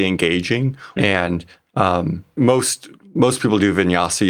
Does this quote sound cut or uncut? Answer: cut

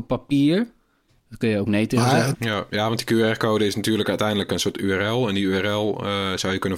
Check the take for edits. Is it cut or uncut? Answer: cut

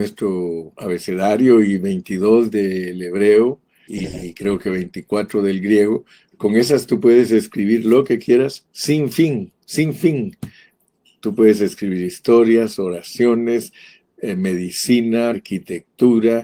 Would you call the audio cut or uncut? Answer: cut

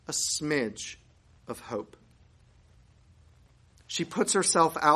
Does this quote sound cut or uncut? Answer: uncut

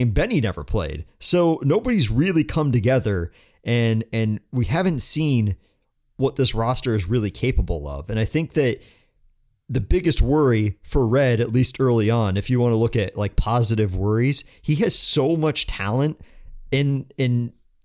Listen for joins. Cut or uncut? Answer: uncut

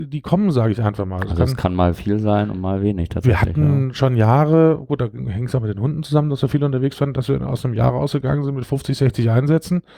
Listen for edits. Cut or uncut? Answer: uncut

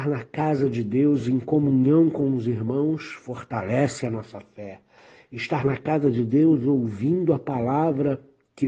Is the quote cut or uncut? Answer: uncut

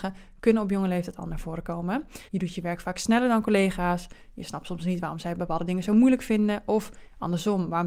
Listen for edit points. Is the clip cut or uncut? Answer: cut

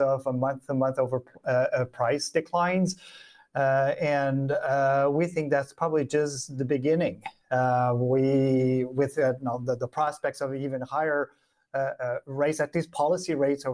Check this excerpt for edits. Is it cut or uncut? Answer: uncut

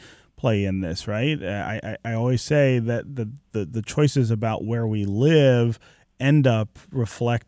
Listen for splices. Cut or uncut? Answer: uncut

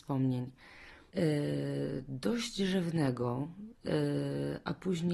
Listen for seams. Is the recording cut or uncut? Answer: cut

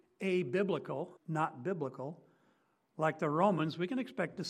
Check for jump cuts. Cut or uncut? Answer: cut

